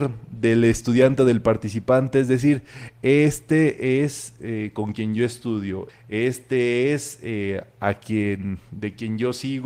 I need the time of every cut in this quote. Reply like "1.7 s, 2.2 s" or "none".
5.9 s